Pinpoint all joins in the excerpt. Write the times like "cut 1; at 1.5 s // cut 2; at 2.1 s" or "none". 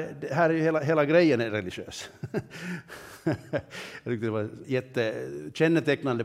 cut 1; at 4.6 s